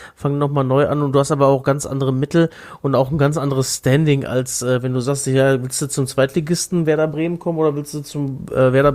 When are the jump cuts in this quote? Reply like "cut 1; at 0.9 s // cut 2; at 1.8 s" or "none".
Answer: none